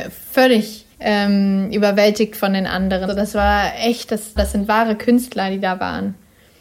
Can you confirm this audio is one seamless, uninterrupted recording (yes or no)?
no